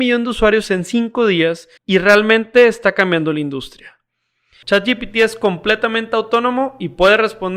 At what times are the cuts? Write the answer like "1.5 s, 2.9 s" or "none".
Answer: 1.8 s, 4.6 s